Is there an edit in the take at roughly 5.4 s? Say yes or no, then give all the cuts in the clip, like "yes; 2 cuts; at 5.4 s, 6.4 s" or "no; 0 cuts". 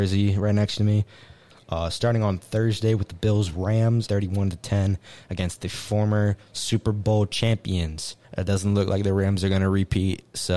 no; 3 cuts; at 1.5 s, 4.1 s, 8.2 s